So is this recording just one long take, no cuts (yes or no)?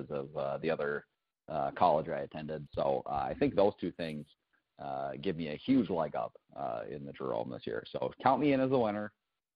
no